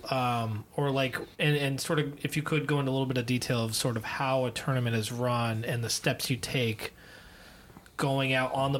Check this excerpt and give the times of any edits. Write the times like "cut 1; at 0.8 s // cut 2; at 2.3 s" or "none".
cut 1; at 1.3 s